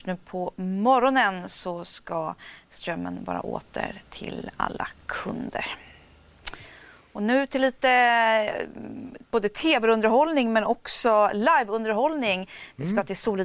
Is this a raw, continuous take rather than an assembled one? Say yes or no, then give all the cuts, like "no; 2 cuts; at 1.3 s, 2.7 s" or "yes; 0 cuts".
no; 1 cut; at 9.3 s